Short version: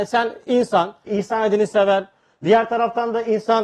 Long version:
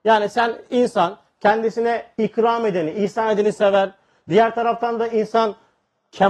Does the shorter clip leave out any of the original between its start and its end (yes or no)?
yes